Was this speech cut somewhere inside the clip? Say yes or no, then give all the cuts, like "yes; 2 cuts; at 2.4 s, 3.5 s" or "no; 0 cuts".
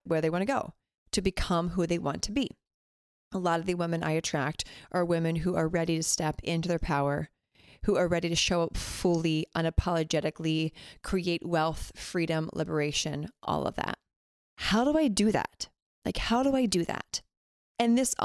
yes; 1 cut; at 14.4 s